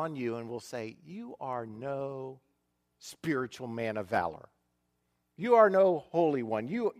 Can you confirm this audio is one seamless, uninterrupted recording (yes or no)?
yes